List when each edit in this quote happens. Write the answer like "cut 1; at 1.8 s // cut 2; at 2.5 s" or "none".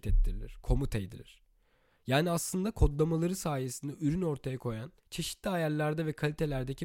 cut 1; at 5.0 s